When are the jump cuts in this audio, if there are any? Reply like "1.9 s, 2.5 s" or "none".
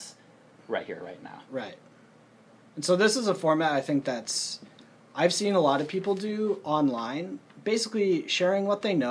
none